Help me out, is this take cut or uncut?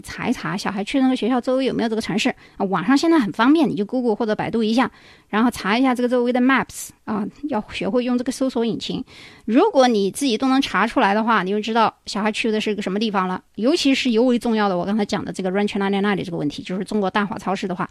uncut